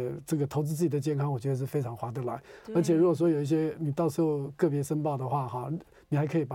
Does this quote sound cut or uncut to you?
uncut